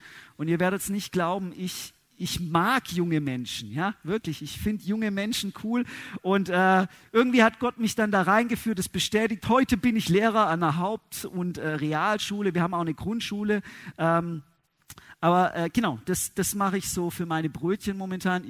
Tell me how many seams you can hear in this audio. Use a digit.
0